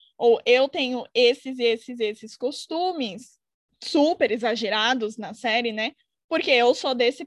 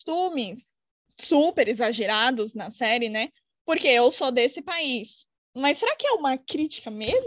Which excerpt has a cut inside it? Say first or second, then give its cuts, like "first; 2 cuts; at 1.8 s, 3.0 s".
second; 1 cut; at 5.4 s